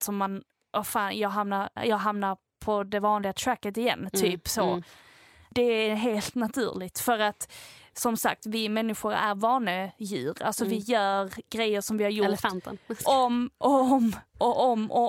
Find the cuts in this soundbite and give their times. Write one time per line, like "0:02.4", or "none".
none